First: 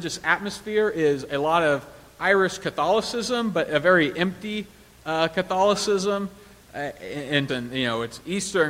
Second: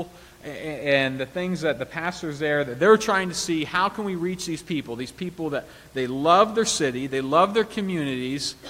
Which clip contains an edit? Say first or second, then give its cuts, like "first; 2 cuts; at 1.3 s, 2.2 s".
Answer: first; 1 cut; at 7.5 s